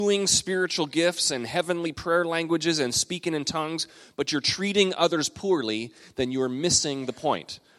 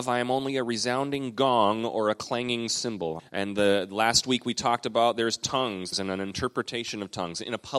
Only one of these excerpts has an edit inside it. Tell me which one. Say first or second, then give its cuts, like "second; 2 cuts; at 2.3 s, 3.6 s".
second; 2 cuts; at 3.2 s, 5.9 s